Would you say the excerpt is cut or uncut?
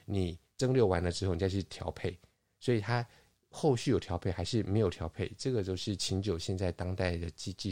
uncut